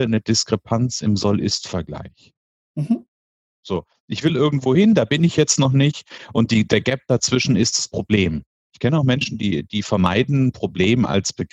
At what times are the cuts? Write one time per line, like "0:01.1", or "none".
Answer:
0:08.7